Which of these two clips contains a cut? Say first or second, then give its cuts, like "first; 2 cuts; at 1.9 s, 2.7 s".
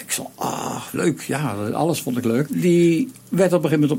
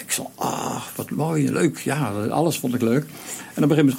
first; 2 cuts; at 0.9 s, 2.5 s